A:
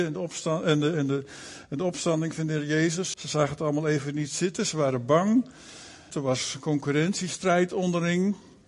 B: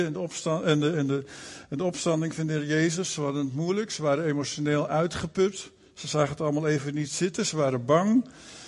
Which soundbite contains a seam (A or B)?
A